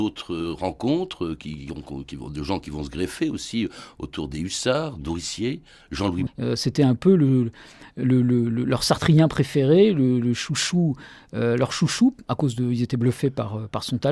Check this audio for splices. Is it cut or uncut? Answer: cut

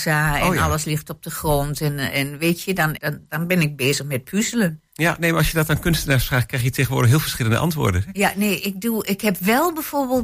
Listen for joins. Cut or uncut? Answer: cut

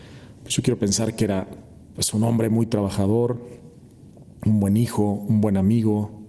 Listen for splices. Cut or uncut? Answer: uncut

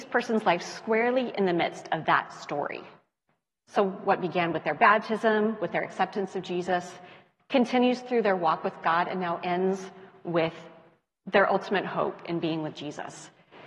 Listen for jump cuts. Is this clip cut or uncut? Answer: uncut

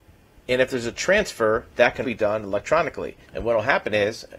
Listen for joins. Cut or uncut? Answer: cut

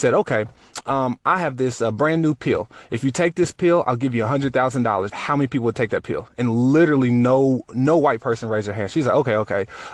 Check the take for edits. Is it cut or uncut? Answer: cut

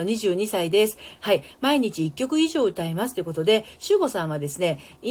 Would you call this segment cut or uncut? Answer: cut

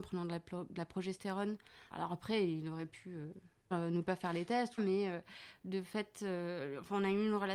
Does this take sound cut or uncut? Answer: cut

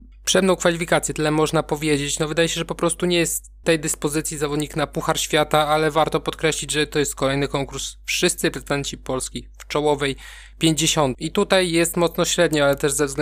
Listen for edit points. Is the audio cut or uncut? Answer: cut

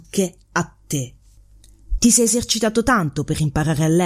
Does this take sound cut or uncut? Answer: cut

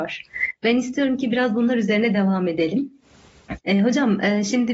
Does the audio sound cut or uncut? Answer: cut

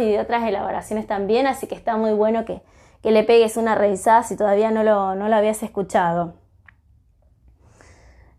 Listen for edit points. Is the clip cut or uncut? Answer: uncut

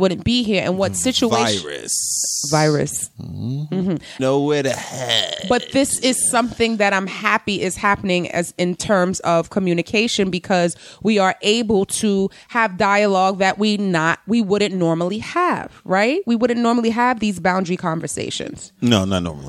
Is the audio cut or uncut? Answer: cut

